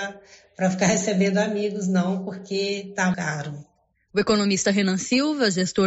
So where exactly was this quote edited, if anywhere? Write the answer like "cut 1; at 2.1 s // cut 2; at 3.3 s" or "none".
cut 1; at 3.1 s